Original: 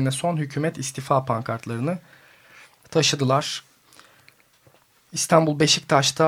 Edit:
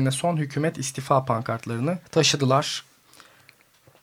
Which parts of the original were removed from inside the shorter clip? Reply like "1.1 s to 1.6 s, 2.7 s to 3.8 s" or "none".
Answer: 2.1 s to 2.8 s